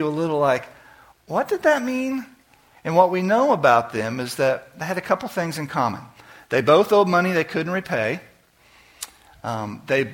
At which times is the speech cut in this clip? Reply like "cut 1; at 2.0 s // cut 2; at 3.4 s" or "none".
cut 1; at 2.7 s